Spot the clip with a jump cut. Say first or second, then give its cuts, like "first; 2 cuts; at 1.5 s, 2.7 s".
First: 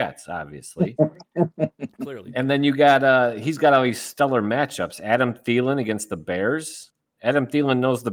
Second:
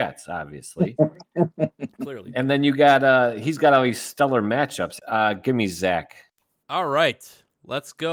second; 2 cuts; at 5.0 s, 6.6 s